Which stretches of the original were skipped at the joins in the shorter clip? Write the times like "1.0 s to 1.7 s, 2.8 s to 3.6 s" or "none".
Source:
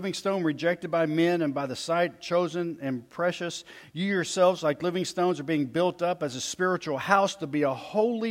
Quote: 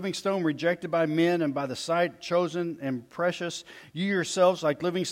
none